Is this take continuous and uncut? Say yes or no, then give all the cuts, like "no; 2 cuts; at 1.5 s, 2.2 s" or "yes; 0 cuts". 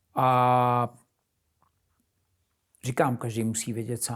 yes; 0 cuts